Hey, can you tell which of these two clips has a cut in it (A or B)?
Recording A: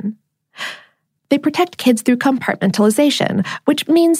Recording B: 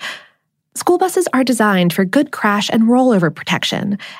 A